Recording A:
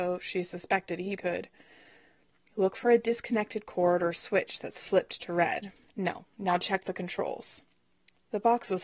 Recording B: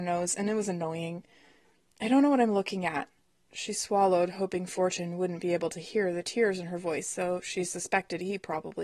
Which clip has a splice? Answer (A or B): A